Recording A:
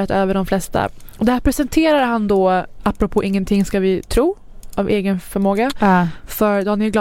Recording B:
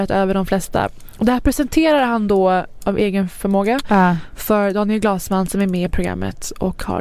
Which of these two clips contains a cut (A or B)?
B